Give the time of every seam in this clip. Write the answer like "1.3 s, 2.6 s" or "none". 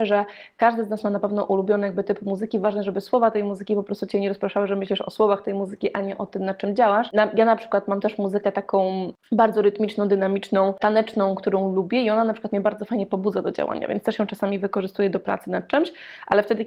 none